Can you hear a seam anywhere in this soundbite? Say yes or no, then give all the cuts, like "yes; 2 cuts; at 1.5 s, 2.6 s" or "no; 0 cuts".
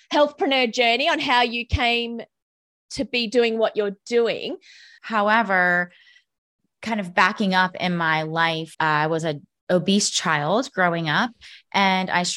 yes; 2 cuts; at 5.0 s, 8.7 s